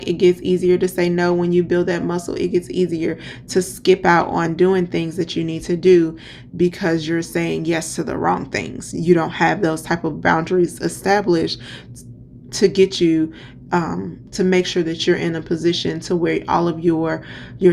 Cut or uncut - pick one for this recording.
uncut